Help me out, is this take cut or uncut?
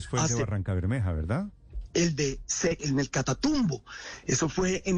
cut